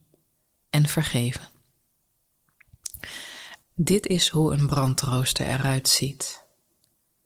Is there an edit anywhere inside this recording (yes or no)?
yes